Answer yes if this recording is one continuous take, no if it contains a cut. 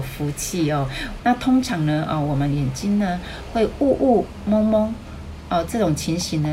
no